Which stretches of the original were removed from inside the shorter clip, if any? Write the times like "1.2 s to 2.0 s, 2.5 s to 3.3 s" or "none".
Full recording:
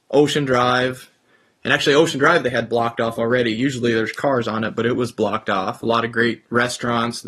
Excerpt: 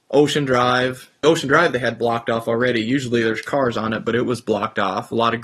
1.2 s to 1.9 s